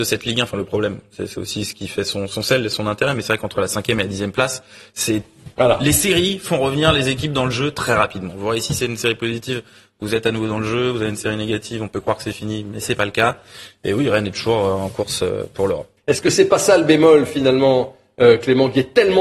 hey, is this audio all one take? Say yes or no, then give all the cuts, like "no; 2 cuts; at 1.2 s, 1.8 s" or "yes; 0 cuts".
yes; 0 cuts